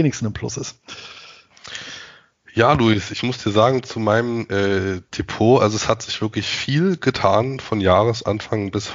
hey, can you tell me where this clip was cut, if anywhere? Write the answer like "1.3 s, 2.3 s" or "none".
5.1 s

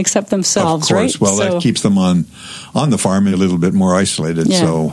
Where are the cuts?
3.3 s

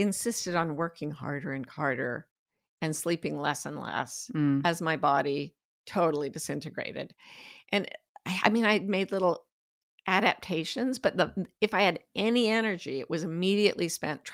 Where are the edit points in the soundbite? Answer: none

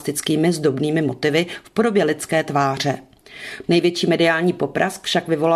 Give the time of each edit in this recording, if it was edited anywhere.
3.6 s

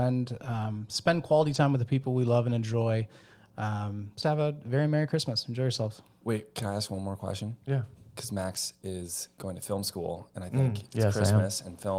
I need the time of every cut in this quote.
4.2 s

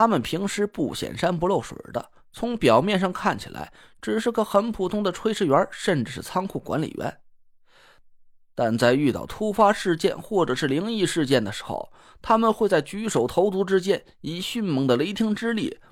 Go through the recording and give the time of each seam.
none

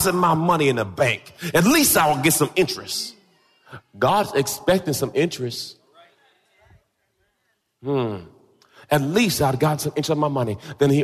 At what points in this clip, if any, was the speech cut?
none

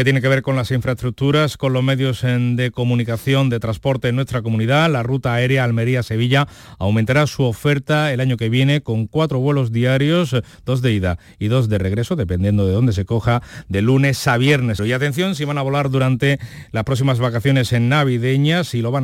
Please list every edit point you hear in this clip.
14.8 s

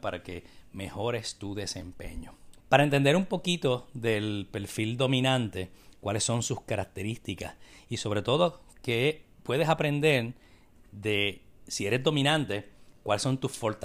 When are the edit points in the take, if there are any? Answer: 2.6 s

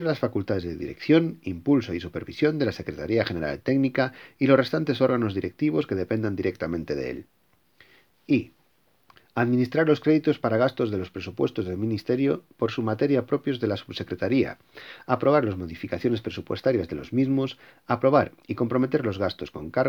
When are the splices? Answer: none

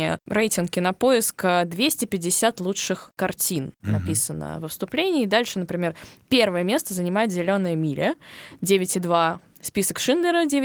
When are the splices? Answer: 3.8 s

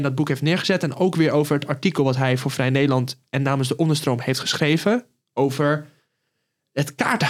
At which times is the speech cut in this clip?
none

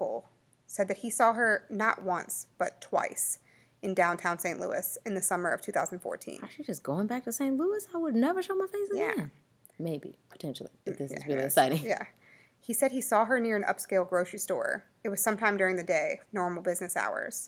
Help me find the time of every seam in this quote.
16.3 s

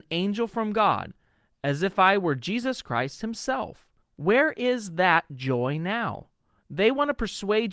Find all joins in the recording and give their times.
4.0 s, 6.6 s

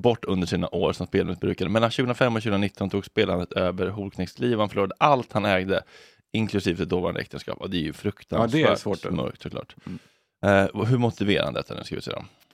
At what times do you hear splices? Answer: none

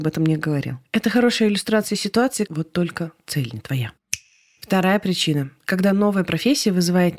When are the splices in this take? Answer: 2.5 s

